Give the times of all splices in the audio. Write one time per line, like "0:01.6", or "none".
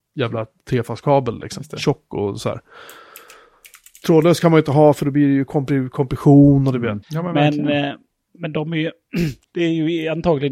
0:07.0
0:09.4